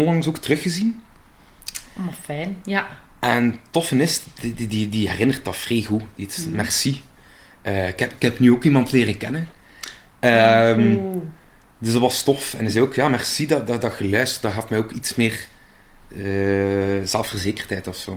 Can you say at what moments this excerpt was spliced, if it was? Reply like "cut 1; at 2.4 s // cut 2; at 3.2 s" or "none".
none